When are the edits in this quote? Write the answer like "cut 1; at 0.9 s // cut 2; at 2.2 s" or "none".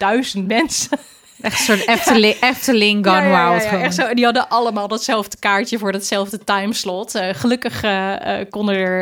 none

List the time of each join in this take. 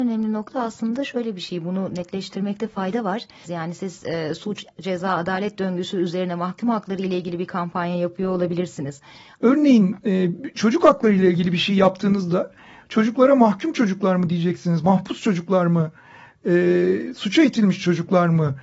cut 1; at 3.4 s // cut 2; at 9.4 s

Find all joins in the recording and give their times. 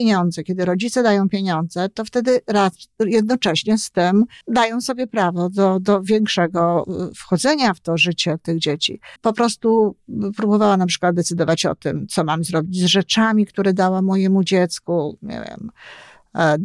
cut 1; at 4.4 s // cut 2; at 9.2 s

